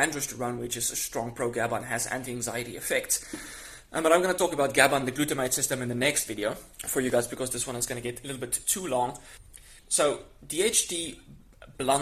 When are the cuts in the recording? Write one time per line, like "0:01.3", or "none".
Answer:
0:06.7
0:09.8